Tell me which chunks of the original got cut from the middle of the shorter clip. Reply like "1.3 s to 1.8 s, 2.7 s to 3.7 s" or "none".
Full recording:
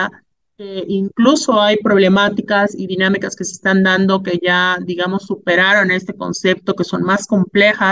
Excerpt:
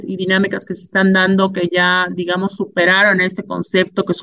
none